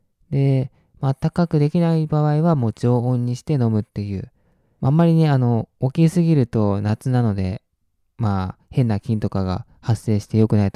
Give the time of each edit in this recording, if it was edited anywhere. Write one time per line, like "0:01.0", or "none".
none

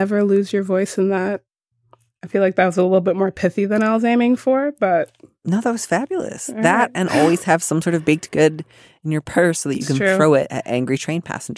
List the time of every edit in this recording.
none

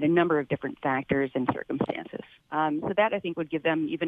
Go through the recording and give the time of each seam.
0:02.4

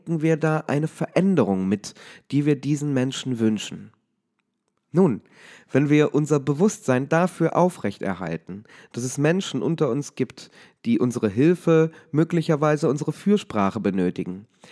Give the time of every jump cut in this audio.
0:04.8

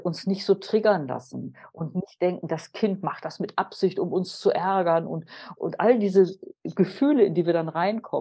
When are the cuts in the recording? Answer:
0:05.6

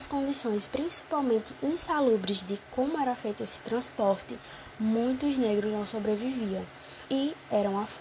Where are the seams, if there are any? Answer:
0:07.1

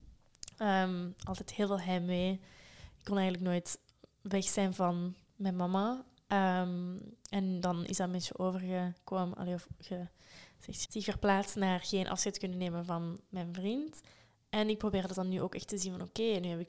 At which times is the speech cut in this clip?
0:10.9
0:14.4

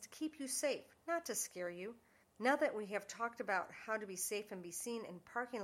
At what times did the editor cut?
0:02.2

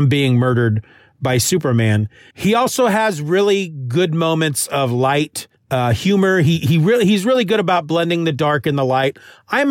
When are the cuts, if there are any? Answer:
0:02.3

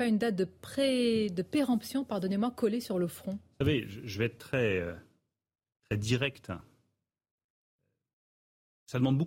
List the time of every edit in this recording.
none

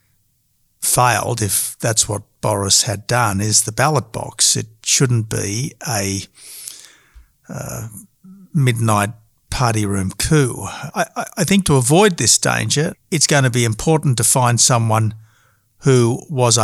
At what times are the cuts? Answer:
0:10.9
0:12.9

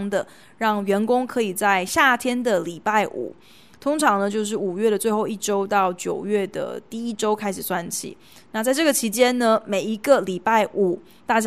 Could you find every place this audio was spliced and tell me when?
none

